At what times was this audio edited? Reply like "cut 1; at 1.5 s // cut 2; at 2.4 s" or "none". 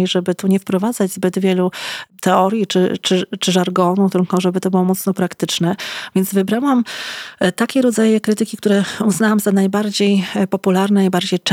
none

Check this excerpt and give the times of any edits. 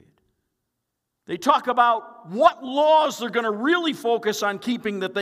cut 1; at 1.1 s

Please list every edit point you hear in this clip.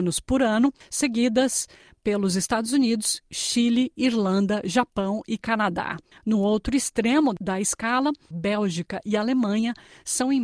cut 1; at 6.2 s // cut 2; at 8.3 s

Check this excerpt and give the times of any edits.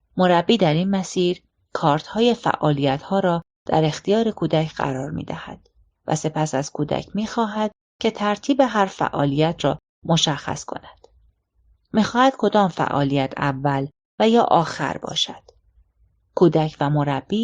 none

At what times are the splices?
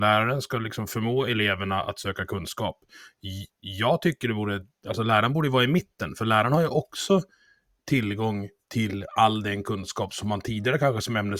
none

